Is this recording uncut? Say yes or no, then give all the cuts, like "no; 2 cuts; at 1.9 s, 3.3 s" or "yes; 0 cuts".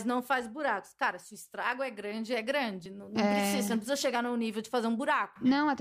yes; 0 cuts